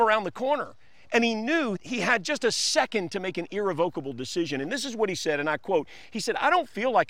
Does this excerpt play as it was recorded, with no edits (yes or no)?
no